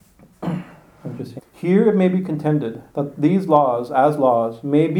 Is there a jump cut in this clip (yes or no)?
yes